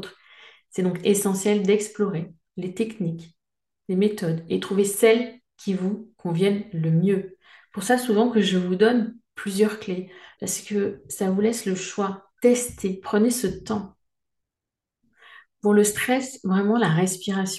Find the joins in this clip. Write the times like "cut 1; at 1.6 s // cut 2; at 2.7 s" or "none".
cut 1; at 10.3 s